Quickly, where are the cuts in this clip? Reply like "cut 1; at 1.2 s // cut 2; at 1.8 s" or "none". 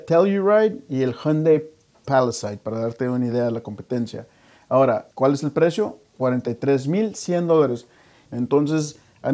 cut 1; at 5.1 s // cut 2; at 8.3 s